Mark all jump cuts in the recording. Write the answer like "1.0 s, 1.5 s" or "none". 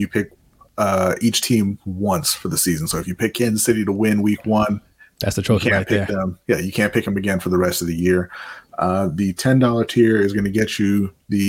none

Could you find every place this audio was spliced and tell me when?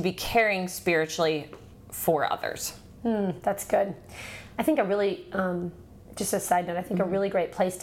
none

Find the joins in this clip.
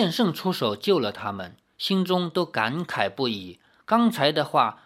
none

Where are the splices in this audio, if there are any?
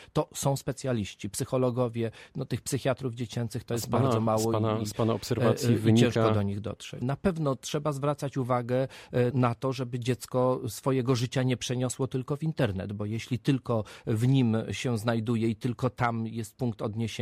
7.0 s, 9.3 s

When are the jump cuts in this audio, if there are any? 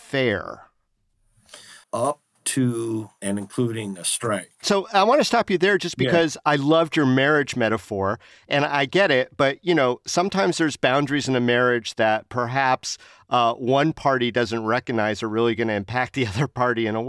1.8 s

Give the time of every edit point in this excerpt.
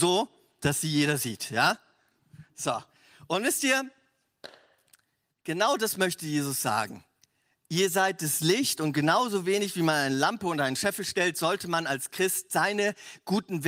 none

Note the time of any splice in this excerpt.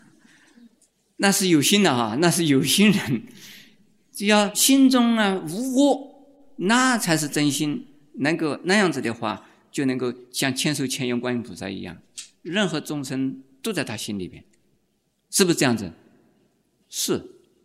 none

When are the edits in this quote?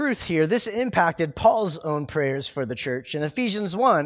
none

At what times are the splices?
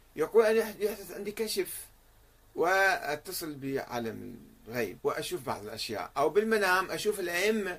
5.0 s

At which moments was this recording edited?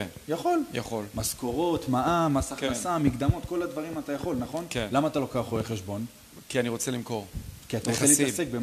none

